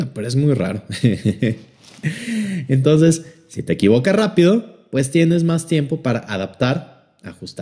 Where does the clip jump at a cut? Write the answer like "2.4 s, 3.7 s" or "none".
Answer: none